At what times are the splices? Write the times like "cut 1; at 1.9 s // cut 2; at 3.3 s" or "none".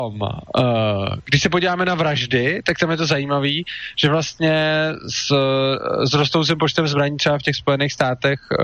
none